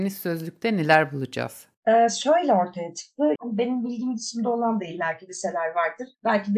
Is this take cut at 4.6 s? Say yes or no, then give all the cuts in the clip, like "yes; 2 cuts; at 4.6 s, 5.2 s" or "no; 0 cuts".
no; 2 cuts; at 1.8 s, 3.4 s